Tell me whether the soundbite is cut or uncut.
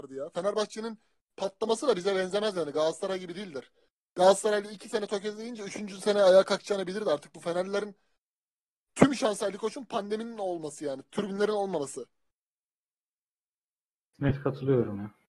uncut